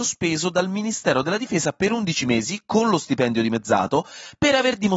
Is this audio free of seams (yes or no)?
yes